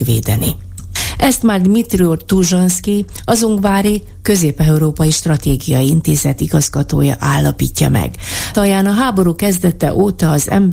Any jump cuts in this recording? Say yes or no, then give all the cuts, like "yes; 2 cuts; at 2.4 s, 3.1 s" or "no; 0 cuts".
yes; 1 cut; at 8.5 s